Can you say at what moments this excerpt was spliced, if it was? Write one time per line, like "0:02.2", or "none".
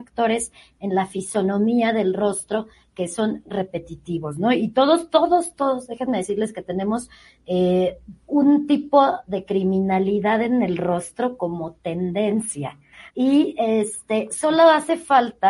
0:13.1